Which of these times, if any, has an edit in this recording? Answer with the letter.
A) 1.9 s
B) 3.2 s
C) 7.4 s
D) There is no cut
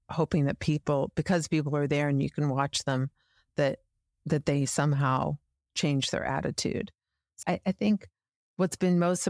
C